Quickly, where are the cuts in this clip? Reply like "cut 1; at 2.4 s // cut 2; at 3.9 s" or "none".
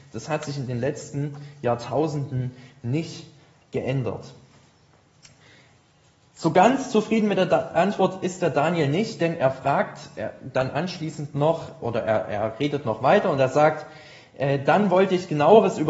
none